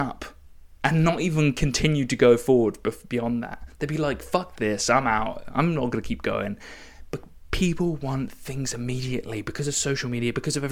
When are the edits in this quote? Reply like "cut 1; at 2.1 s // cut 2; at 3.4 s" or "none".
none